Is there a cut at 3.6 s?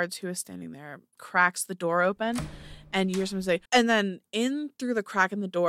yes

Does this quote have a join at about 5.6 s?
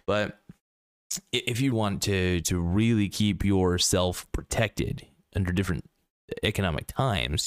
no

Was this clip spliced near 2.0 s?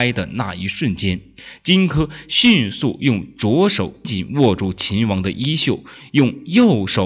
no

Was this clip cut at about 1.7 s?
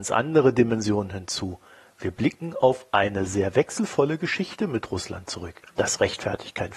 no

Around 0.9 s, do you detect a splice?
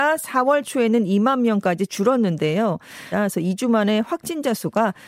no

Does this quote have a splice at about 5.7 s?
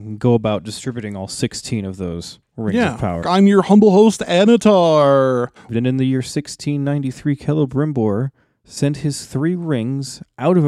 yes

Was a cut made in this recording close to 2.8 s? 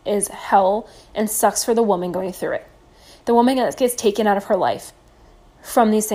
no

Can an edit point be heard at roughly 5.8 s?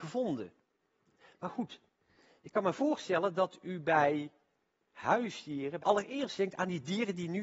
yes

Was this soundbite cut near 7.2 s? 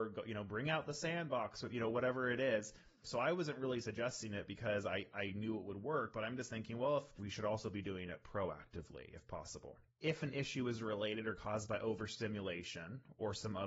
yes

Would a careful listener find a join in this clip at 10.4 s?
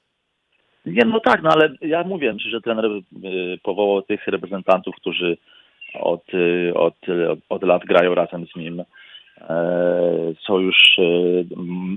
no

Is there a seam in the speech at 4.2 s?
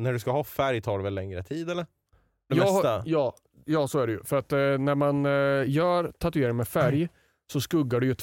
no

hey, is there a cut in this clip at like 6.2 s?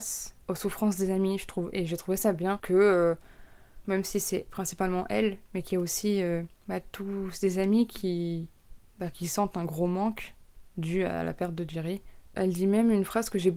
no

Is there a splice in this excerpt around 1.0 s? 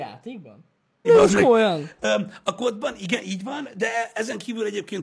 yes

